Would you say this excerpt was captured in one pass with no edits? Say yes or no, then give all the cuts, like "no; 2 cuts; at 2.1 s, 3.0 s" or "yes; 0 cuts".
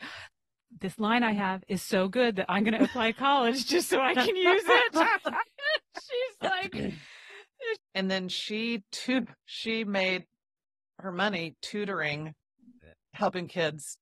no; 2 cuts; at 7.8 s, 9.4 s